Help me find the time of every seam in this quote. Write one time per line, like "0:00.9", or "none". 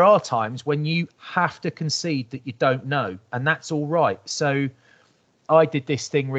none